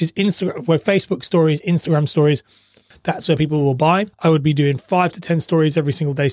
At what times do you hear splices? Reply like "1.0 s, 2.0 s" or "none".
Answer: 2.9 s, 4.1 s